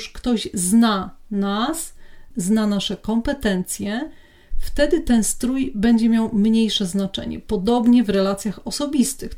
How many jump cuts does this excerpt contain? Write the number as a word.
one